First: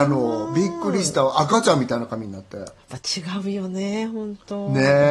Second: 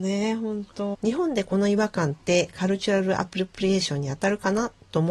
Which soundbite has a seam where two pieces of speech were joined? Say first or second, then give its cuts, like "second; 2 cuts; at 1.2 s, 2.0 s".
second; 1 cut; at 0.9 s